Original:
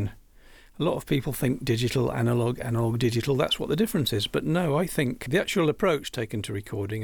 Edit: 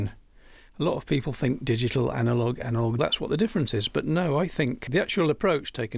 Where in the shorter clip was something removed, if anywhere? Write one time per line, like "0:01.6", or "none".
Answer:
0:03.0